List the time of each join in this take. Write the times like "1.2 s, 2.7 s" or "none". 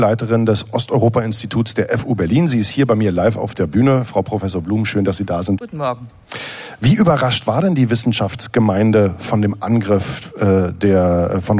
5.6 s